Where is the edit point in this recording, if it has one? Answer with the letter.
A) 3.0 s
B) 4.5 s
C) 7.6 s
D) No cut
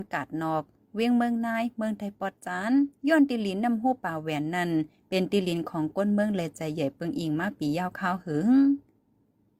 A